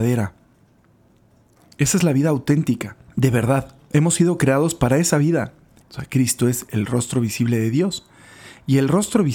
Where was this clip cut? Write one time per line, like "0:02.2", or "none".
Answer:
0:03.1
0:05.8